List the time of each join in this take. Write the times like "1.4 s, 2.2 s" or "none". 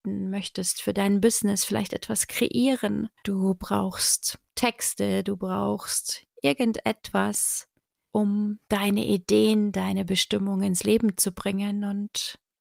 3.2 s